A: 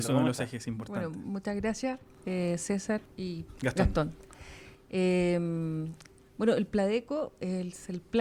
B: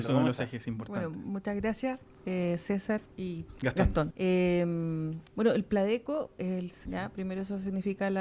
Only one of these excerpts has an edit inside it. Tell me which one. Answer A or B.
B